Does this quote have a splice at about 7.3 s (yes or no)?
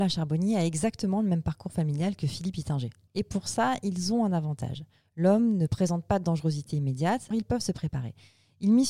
yes